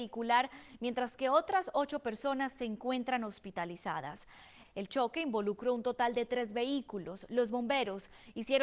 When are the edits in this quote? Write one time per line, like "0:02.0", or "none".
0:04.6